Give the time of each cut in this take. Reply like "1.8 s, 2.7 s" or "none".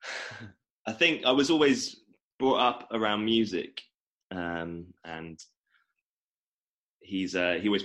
5.0 s